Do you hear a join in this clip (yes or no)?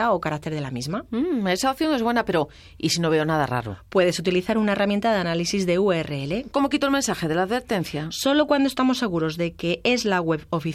yes